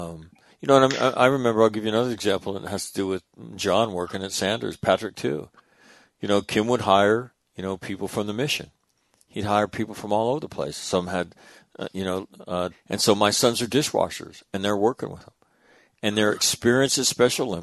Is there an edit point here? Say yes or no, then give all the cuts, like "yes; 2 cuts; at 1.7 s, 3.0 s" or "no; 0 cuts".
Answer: yes; 1 cut; at 12.7 s